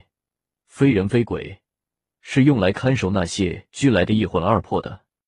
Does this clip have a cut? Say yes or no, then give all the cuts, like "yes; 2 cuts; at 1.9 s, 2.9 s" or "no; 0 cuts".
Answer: no; 0 cuts